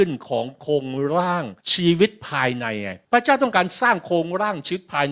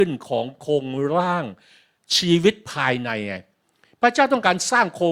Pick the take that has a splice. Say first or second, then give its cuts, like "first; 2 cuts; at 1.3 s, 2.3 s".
first; 2 cuts; at 1.6 s, 3.0 s